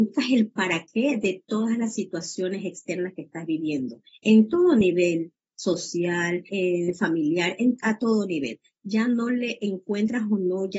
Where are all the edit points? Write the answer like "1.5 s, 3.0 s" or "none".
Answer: 6.5 s